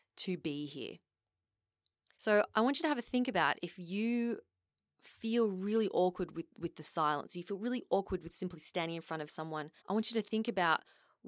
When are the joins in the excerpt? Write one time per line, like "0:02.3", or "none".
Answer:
0:02.1
0:09.8

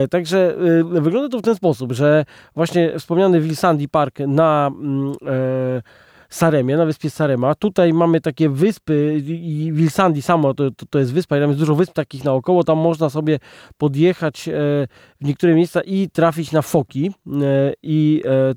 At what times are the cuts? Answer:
none

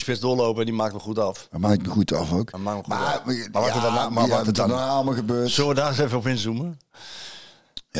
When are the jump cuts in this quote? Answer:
none

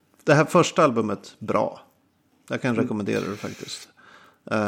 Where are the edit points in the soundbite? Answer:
none

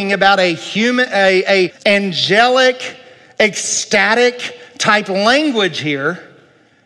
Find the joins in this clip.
0:01.7

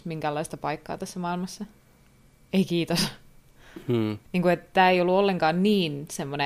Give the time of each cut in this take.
0:04.2

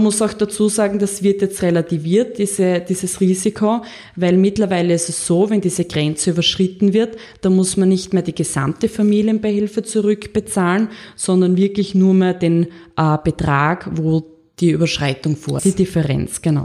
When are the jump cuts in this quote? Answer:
0:15.6

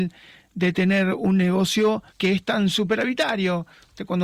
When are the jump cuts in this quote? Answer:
0:02.1

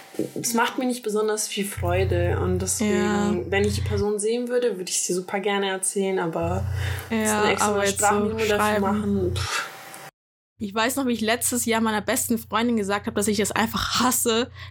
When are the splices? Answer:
none

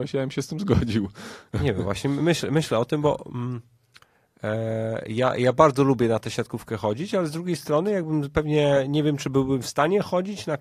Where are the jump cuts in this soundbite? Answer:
none

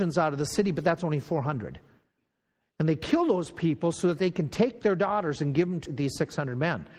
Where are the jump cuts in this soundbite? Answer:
0:05.9

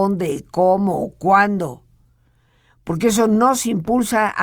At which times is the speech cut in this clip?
none

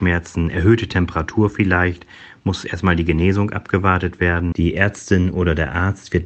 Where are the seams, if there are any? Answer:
0:04.5

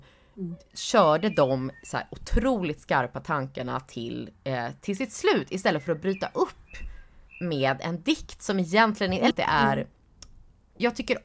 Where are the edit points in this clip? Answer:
0:09.3

